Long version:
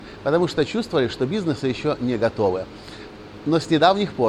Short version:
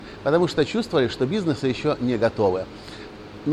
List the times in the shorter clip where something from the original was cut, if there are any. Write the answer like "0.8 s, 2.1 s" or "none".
none

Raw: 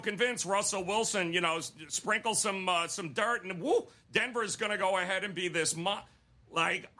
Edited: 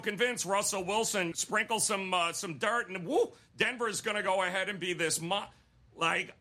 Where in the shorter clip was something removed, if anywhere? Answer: 1.3 s

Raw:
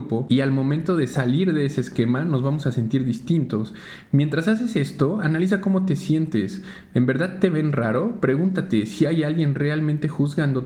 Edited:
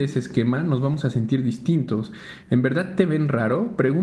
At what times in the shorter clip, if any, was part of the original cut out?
2.4 s

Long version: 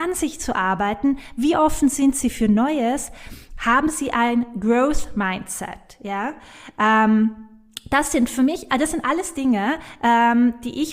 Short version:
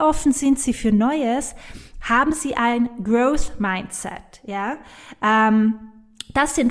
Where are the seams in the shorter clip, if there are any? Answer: none

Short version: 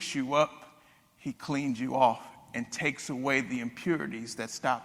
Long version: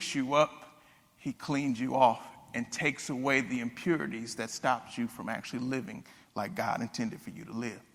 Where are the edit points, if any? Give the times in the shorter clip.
none

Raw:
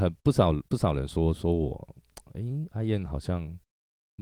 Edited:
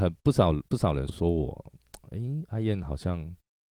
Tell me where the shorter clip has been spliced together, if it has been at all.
1.1 s

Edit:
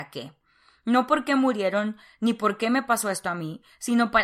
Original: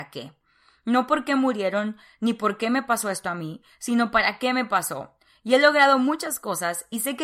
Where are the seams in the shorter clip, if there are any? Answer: none

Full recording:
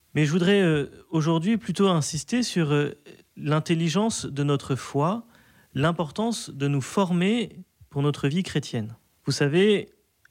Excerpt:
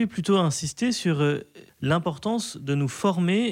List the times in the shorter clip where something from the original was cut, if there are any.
1.7 s

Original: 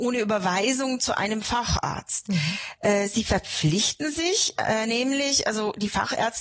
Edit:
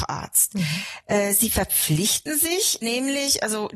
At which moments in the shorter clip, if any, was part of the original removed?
2.8 s

